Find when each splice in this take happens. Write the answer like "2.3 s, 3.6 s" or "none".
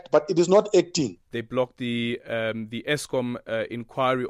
1.3 s